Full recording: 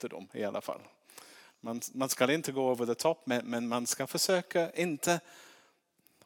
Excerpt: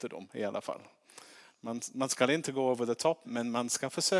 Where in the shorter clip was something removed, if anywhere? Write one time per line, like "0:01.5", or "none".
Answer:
0:03.2